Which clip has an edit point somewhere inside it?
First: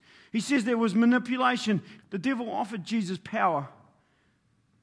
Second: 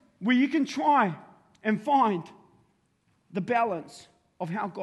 first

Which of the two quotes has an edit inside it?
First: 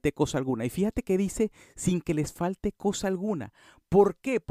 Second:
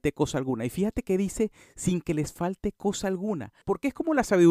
second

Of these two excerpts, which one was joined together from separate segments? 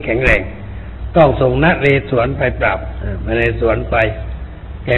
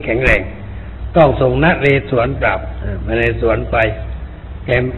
second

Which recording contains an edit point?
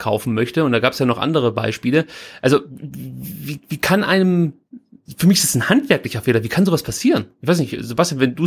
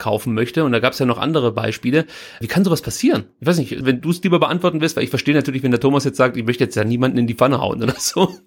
second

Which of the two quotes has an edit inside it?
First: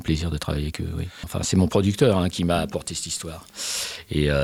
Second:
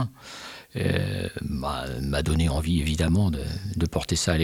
first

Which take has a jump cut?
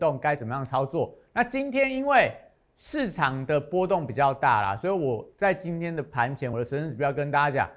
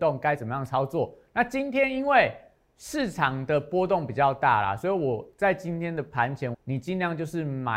second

